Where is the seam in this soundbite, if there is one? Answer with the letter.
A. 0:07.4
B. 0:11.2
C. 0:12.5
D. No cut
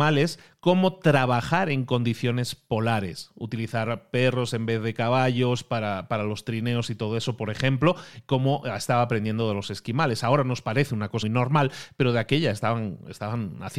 B